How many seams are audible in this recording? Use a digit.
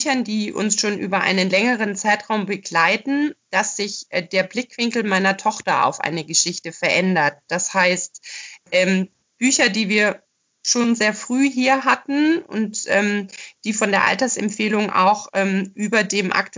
0